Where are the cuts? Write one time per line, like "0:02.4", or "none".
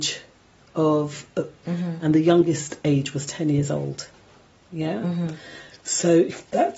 0:01.6